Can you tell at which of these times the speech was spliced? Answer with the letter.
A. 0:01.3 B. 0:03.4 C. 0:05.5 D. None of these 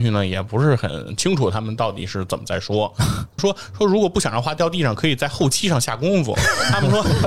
B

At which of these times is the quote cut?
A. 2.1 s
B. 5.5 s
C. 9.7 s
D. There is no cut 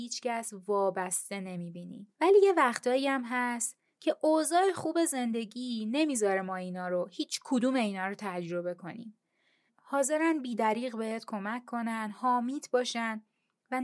C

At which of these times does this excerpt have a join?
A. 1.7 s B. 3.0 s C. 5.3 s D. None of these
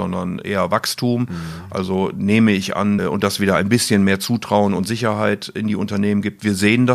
B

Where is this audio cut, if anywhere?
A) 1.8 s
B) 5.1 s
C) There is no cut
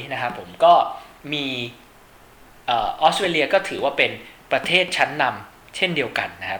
C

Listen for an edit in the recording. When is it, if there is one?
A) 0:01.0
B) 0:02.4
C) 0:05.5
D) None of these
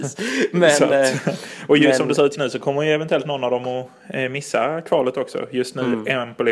B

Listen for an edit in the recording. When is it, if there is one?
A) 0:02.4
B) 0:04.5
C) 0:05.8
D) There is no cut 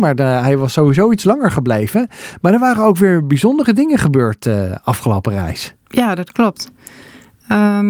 D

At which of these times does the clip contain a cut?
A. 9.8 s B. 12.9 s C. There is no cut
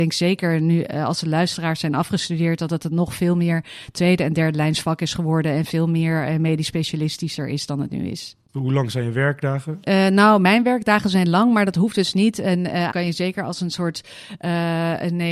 B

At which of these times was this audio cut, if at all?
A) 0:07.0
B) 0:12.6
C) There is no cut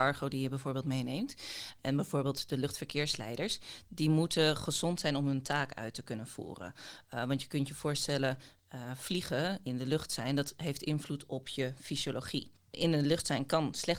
C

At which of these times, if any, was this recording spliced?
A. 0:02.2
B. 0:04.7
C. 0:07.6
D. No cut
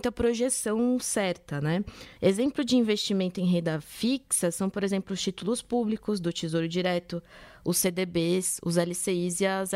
A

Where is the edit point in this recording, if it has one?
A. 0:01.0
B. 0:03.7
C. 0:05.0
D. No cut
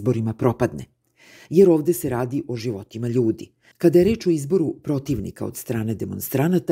B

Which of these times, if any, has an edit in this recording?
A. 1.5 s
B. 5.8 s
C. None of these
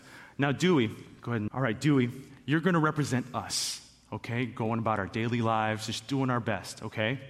A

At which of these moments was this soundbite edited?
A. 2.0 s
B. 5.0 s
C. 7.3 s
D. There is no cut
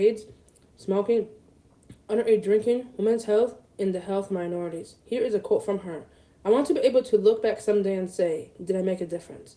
B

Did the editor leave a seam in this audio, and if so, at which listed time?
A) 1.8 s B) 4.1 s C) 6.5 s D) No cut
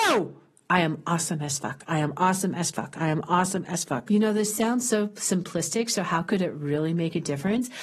B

